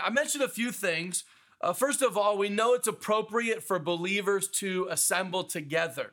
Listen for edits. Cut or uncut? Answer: uncut